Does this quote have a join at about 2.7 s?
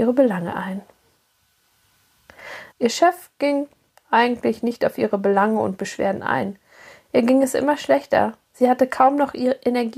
yes; 1 cut; at 2.7 s

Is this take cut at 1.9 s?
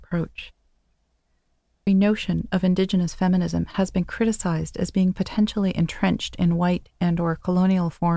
yes; 1 cut; at 1.9 s

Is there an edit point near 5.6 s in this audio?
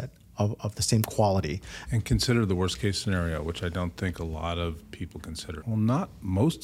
yes; 2 cuts; at 1.9 s, 5.6 s

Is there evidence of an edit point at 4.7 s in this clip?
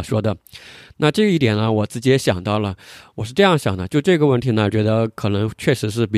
yes; 1 cut; at 4.7 s

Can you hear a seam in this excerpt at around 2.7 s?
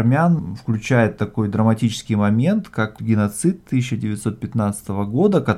no; 0 cuts

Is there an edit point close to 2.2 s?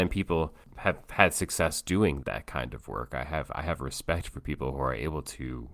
yes; 1 cut; at 2.2 s

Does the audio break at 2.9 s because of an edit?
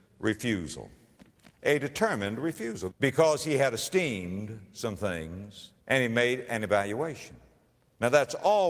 yes; 2 cuts; at 2.9 s, 5.8 s

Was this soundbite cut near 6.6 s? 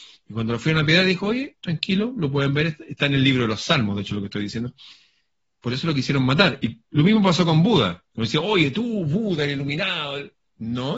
no; 0 cuts

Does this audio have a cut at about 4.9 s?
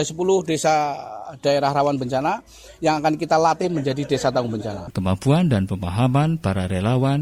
yes; 1 cut; at 4.9 s

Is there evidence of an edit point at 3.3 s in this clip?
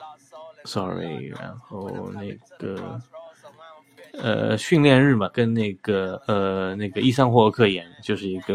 no; 0 cuts

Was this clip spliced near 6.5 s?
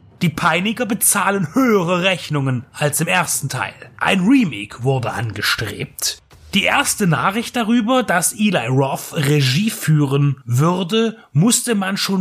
no; 1 cut; at 4.0 s

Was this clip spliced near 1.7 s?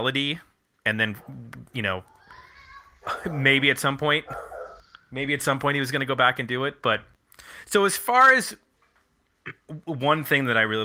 no; 0 cuts

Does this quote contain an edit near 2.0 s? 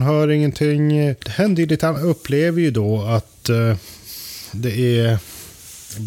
yes; 1 cut; at 2.0 s

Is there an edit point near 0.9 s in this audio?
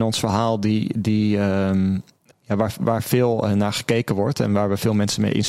no; 1 cut; at 2.3 s

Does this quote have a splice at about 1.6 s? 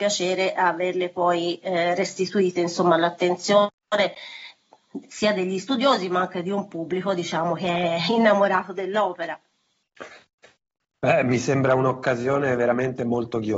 no; 0 cuts

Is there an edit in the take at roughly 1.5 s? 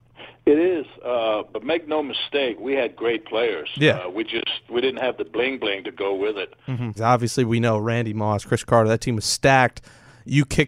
no; 1 cut; at 7.0 s

